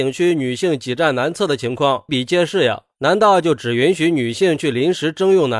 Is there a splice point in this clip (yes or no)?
yes